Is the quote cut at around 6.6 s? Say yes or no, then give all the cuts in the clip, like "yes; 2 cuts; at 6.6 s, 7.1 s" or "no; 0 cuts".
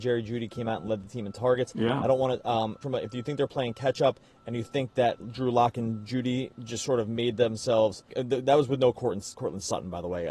no; 2 cuts; at 2.8 s, 8.1 s